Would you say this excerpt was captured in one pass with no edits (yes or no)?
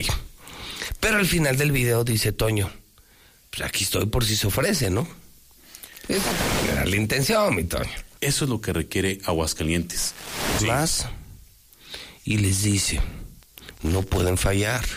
no